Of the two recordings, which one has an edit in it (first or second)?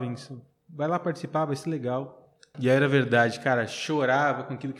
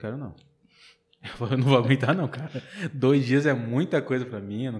first